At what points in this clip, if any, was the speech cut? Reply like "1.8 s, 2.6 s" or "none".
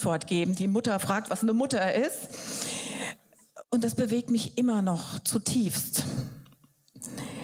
3.6 s

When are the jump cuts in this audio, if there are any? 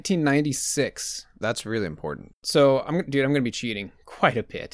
2.3 s

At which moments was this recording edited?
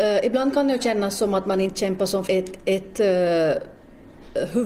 2.3 s

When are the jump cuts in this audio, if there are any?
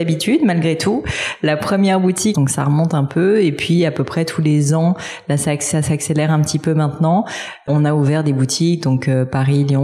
2.3 s

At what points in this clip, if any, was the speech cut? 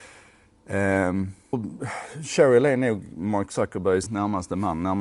1.5 s, 4.1 s

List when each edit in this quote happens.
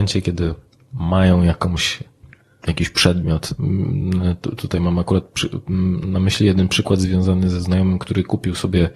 none

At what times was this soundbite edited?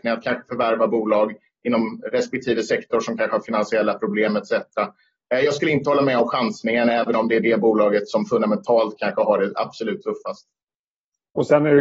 none

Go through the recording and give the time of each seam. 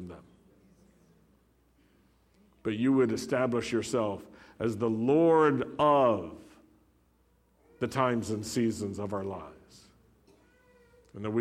none

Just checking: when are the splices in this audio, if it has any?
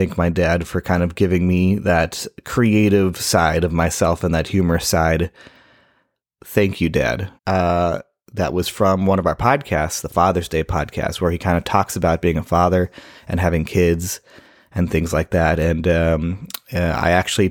7.4 s

